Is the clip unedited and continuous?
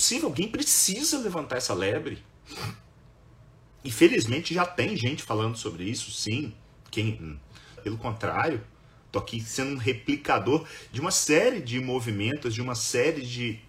no; 1 cut; at 7.8 s

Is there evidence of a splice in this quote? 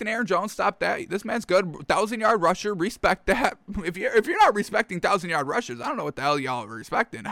no; 0 cuts

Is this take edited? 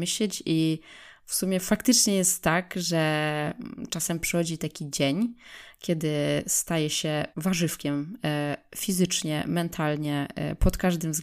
yes; 1 cut; at 7.3 s

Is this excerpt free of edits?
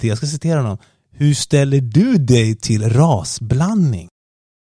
yes; 0 cuts

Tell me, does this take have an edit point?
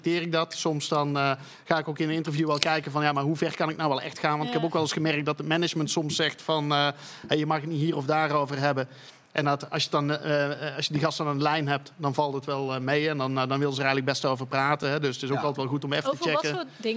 no; 0 cuts

